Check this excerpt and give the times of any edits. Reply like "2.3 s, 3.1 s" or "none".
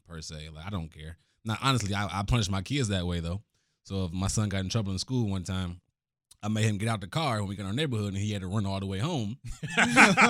none